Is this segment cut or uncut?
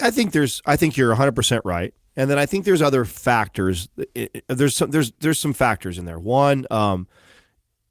uncut